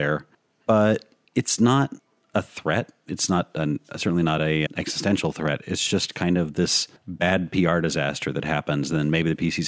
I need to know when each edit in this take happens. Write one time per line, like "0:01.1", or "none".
0:04.7